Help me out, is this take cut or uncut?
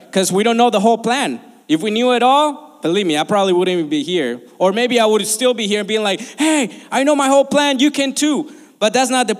uncut